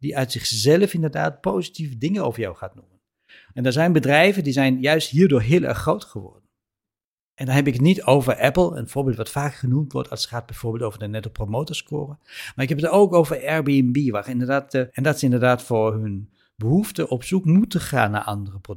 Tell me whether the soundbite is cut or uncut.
cut